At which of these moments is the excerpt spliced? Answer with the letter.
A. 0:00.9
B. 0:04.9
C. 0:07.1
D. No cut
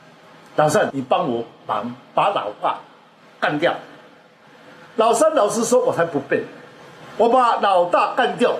A